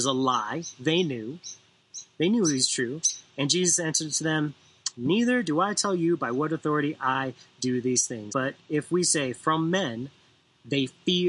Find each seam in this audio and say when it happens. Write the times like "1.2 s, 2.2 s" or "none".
4.9 s, 8.3 s